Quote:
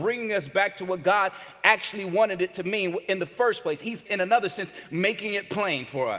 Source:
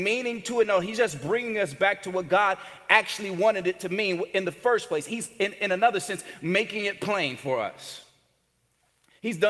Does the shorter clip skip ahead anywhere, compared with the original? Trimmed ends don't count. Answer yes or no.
yes